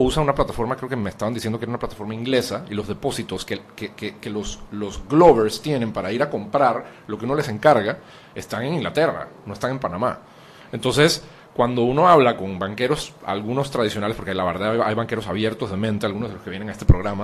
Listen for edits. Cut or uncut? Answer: uncut